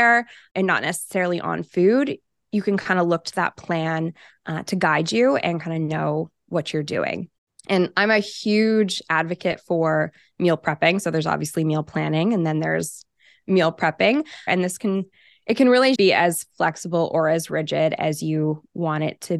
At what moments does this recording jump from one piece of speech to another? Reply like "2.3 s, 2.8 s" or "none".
14.5 s, 16.0 s